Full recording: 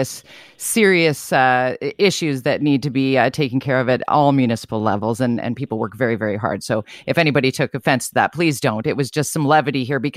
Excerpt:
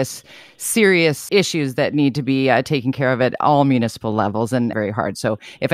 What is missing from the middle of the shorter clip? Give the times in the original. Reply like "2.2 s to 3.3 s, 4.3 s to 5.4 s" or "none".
1.3 s to 2.0 s, 5.4 s to 6.2 s